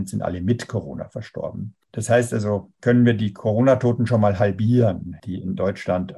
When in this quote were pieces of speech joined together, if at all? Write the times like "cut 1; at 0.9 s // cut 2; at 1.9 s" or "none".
cut 1; at 2.7 s

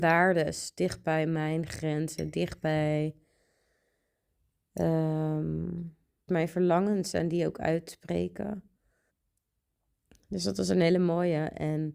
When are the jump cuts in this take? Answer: cut 1; at 6.3 s // cut 2; at 9.1 s

